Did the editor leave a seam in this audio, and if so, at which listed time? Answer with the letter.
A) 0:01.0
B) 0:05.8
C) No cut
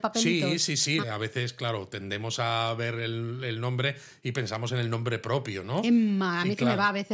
A